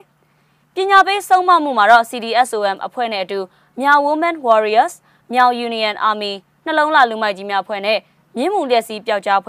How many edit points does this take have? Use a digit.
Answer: 0